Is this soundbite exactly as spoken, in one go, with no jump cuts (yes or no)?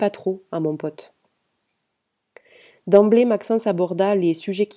yes